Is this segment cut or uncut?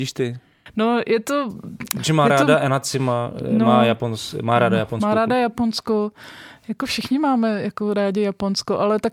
uncut